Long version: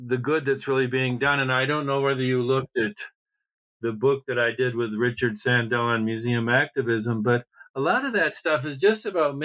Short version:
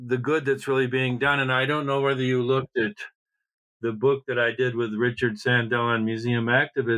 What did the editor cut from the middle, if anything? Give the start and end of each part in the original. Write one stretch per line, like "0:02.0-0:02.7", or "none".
none